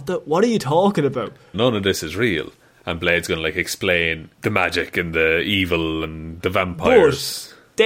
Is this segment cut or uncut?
cut